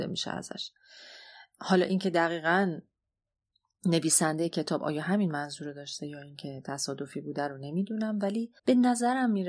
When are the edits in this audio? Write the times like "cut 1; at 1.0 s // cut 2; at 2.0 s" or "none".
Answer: cut 1; at 8.6 s